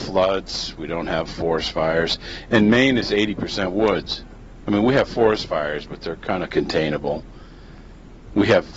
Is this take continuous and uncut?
yes; 0 cuts

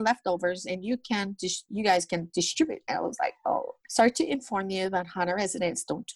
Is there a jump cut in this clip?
yes; 1 cut; at 3.9 s

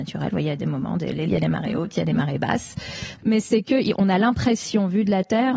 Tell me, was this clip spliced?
yes; 2 cuts; at 1.3 s, 3.2 s

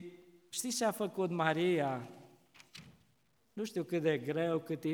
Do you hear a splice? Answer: yes; 1 cut; at 3.4 s

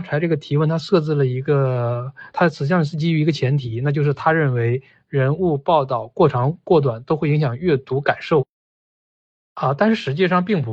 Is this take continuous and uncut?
yes; 0 cuts

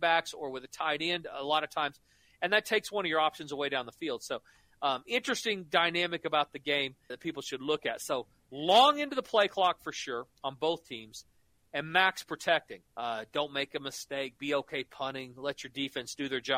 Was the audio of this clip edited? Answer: yes; 2 cuts; at 7.1 s, 12.8 s

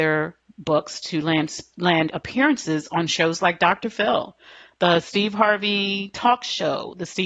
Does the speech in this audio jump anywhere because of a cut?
no; 0 cuts

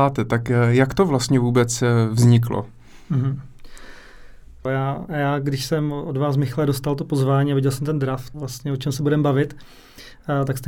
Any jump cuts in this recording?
yes; 2 cuts; at 4.7 s, 8.3 s

